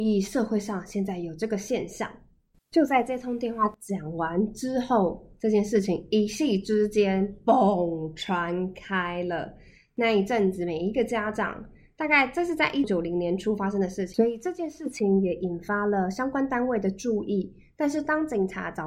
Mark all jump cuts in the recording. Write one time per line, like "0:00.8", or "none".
0:12.8
0:14.1